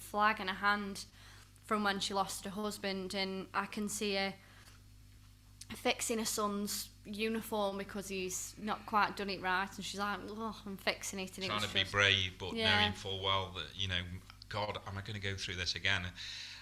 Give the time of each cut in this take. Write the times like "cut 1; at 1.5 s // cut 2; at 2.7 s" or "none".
none